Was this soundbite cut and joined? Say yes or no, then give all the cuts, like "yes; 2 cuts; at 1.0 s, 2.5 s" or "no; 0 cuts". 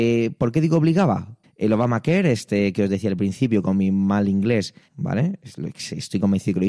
yes; 2 cuts; at 1.4 s, 4.9 s